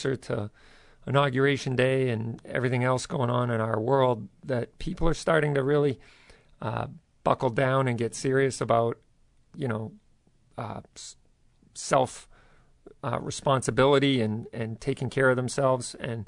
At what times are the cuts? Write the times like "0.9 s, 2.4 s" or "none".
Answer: none